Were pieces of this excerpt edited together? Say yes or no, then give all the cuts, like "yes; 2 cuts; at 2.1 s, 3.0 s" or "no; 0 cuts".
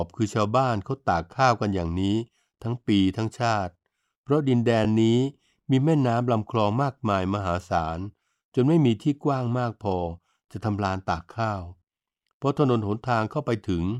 no; 0 cuts